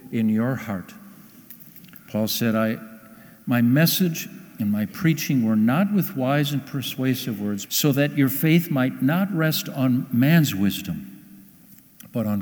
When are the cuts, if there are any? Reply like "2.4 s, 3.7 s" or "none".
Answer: 7.7 s

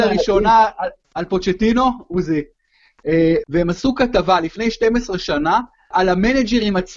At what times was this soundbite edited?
3.4 s, 5.9 s

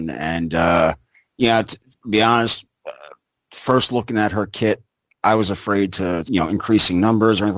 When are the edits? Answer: 6.2 s

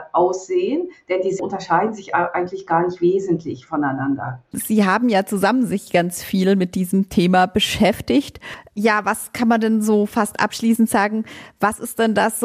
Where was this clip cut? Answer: 4.5 s

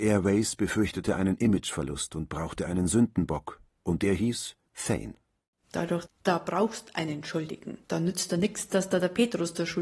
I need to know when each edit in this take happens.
4.7 s, 6.1 s, 7.8 s

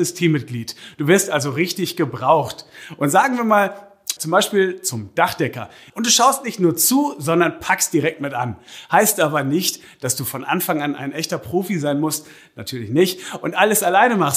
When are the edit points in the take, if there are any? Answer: 4.2 s, 5.9 s

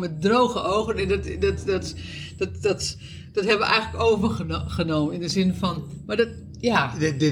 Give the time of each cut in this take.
none

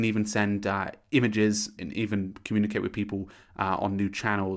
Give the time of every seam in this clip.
1.8 s

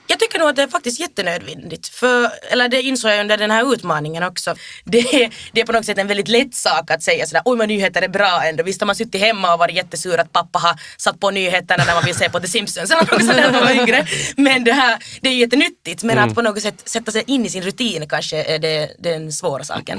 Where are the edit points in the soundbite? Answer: none

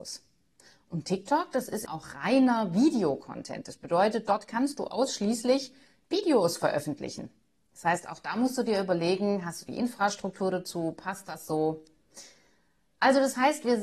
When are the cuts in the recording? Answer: 1.9 s

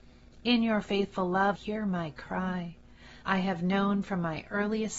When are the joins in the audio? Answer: 1.6 s, 3.2 s

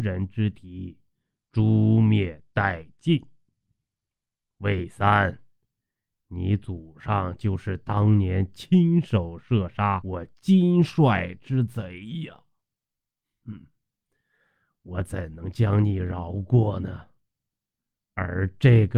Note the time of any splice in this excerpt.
none

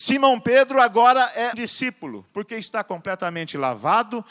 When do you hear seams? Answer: 1.5 s

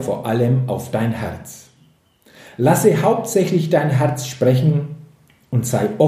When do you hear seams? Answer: none

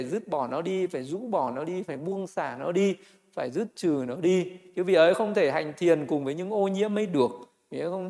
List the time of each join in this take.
none

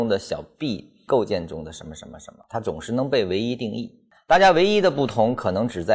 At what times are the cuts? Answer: none

